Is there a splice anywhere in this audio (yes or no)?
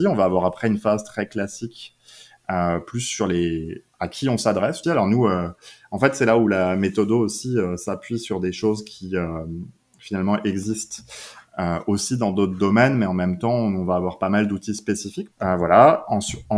yes